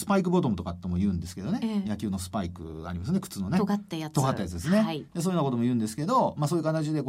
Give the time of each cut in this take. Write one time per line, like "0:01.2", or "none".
none